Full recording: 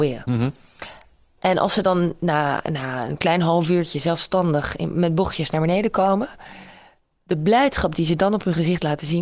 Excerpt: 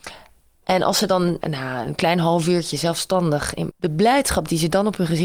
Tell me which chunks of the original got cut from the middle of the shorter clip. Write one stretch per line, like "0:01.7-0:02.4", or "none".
0:02.2-0:02.6
0:04.9-0:07.2